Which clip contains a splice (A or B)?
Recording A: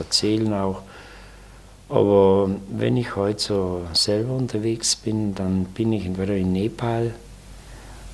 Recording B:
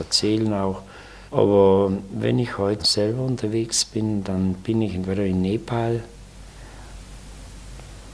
B